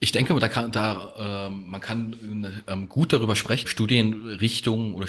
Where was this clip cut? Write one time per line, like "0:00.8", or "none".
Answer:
0:03.6